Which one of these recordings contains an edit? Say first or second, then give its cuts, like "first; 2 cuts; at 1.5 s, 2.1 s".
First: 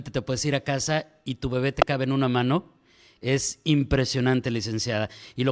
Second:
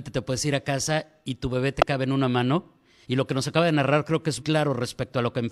second; 2 cuts; at 3.0 s, 4.4 s